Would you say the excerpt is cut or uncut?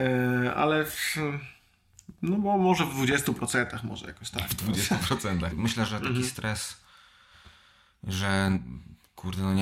cut